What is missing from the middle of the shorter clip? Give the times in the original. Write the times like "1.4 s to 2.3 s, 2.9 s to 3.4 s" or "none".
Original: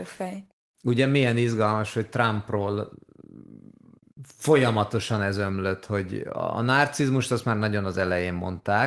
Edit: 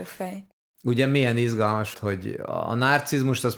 1.9 s to 5.8 s